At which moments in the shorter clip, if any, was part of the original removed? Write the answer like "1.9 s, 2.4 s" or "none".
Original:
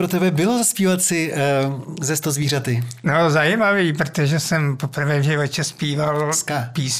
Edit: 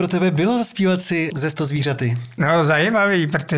1.3 s